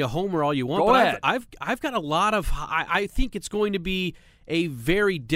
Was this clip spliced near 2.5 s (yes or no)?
no